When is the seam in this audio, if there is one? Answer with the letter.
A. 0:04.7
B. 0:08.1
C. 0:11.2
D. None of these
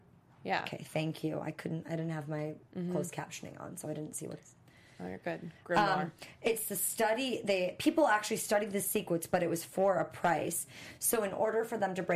D